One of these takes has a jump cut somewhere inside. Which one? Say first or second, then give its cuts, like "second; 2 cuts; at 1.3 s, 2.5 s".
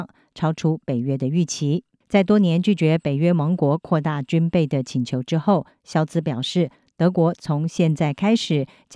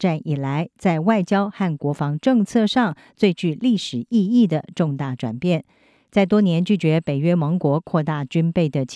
first; 1 cut; at 2.0 s